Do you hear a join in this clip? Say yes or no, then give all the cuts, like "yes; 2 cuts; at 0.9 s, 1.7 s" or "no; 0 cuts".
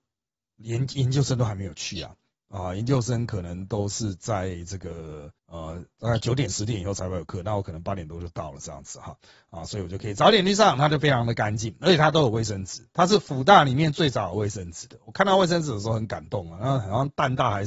yes; 1 cut; at 5.4 s